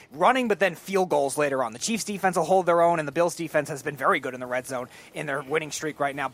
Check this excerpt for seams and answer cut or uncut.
uncut